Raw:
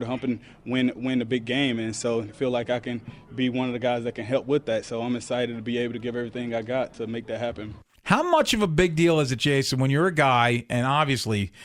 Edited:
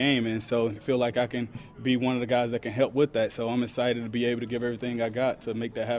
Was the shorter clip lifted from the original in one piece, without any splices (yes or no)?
yes